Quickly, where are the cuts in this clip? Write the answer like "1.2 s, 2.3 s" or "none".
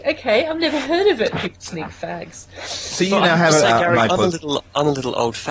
1.3 s